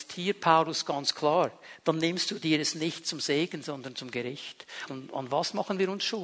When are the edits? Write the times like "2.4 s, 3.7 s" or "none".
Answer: 4.9 s